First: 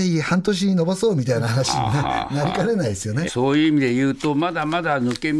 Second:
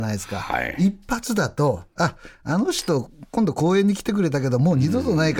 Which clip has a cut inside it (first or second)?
first